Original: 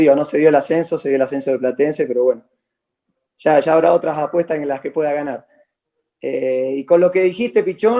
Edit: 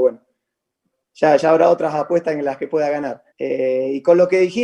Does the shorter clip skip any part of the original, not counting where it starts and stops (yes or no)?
yes